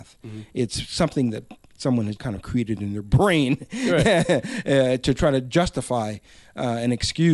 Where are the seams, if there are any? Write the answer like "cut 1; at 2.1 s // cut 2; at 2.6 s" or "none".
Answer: cut 1; at 2.2 s